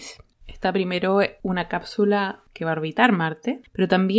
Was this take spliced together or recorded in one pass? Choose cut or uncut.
uncut